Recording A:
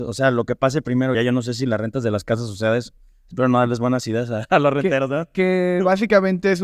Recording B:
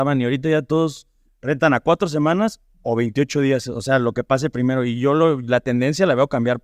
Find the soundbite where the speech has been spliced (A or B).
A